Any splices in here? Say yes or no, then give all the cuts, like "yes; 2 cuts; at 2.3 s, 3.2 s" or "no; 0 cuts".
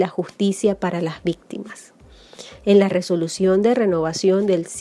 no; 0 cuts